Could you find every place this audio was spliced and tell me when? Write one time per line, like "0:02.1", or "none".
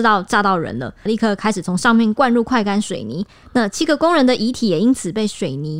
0:01.1